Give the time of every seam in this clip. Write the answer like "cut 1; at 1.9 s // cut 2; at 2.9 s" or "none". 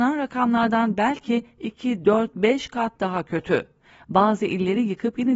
none

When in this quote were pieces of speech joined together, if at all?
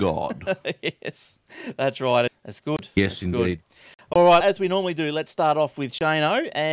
cut 1; at 2.3 s // cut 2; at 4.4 s

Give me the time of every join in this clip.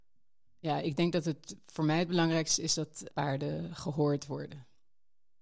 cut 1; at 3.1 s

